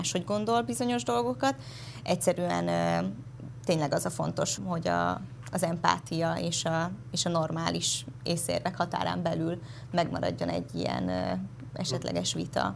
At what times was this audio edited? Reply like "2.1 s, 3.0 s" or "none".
4.6 s